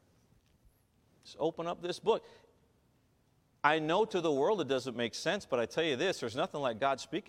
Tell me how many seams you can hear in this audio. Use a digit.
0